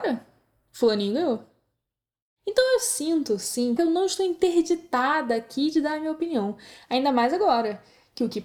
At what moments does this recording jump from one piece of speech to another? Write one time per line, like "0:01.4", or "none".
0:03.8